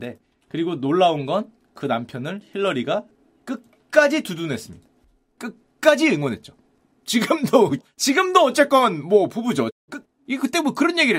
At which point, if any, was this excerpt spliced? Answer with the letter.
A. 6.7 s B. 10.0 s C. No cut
B